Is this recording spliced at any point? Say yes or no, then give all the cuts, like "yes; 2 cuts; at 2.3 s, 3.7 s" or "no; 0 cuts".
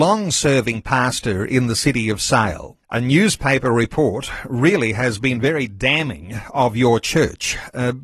yes; 1 cut; at 2.8 s